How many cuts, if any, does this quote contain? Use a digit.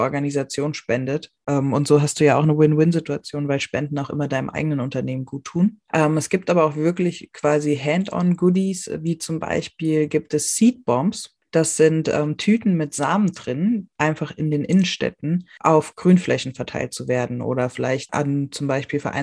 2